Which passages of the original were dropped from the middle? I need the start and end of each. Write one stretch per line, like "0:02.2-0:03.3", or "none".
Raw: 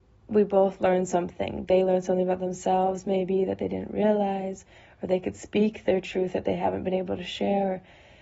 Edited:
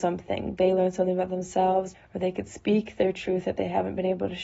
0:03.0-0:04.8

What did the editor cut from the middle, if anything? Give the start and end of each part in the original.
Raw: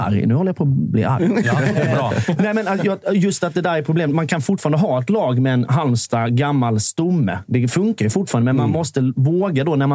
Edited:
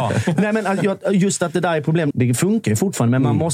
0:04.1-0:07.4

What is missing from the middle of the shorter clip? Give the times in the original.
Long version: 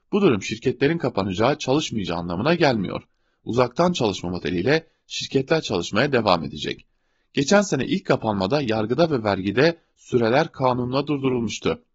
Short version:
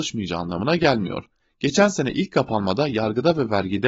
0:03.2-0:07.1

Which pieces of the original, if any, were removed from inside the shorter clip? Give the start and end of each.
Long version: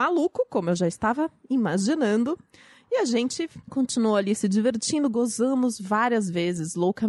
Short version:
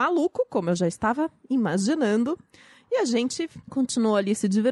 none

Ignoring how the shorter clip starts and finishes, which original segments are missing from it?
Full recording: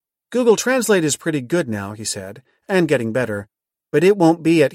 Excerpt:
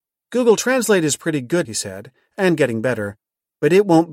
0:01.6-0:02.0

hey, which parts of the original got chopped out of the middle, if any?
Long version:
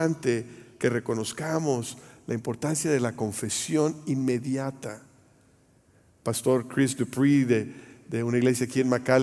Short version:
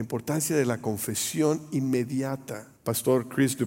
0:05.1-0:06.1

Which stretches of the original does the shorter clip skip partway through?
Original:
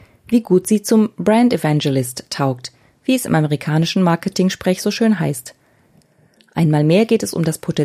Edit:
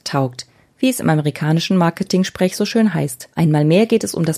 0:05.6-0:06.5

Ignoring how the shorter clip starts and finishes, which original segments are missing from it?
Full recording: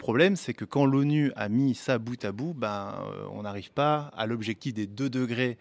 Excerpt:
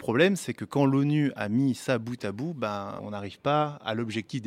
0:03.0-0:03.3

